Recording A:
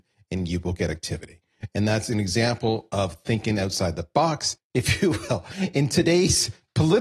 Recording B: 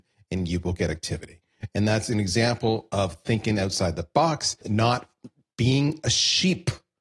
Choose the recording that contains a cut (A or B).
A